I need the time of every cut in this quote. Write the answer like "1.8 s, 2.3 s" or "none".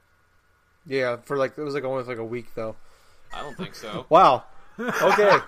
3.3 s